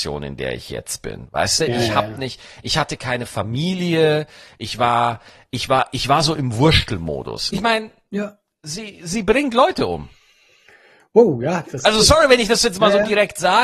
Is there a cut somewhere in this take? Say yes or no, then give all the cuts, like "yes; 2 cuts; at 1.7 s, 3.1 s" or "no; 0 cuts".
yes; 2 cuts; at 7.5 s, 11.6 s